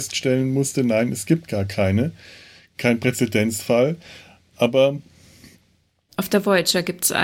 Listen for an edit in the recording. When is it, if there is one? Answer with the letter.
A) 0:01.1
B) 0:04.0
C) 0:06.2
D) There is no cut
D